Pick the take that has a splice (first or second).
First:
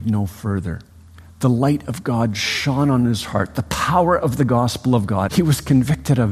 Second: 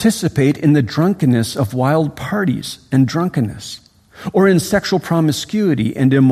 first